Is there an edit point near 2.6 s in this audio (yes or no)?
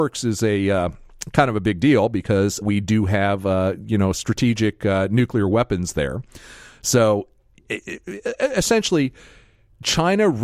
yes